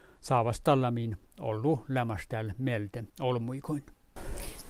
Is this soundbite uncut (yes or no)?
no